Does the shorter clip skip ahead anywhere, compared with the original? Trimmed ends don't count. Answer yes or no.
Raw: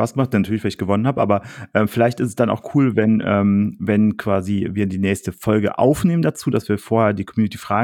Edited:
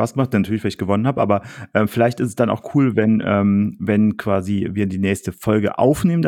no